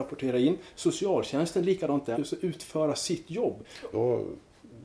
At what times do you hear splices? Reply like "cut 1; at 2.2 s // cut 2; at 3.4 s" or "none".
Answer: cut 1; at 2.1 s // cut 2; at 3.9 s

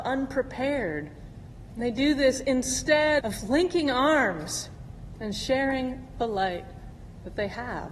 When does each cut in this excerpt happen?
cut 1; at 1.7 s // cut 2; at 3.2 s

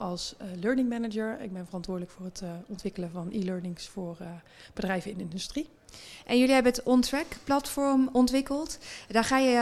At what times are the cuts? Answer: none

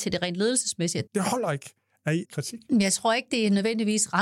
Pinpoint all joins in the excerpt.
cut 1; at 1.1 s // cut 2; at 2.2 s

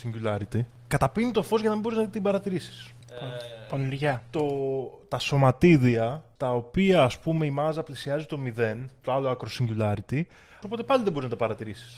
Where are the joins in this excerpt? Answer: cut 1; at 9.0 s // cut 2; at 10.6 s

